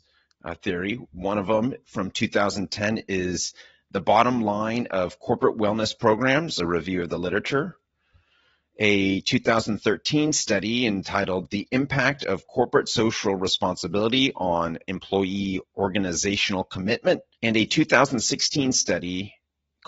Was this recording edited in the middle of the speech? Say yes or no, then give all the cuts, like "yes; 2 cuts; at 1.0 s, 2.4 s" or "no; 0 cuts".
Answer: yes; 1 cut; at 17.3 s